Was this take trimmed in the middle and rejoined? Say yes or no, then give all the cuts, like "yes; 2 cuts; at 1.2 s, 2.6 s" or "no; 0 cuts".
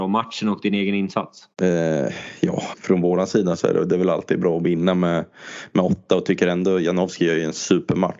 yes; 2 cuts; at 1.5 s, 2.7 s